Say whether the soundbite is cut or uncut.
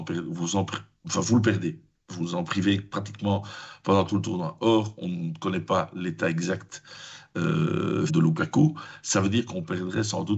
cut